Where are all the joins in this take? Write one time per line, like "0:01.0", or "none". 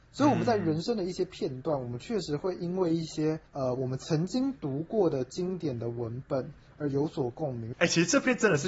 0:03.5
0:07.7